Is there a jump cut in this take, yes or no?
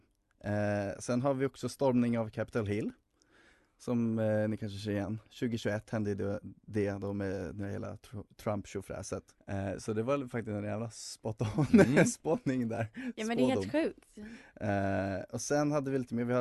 yes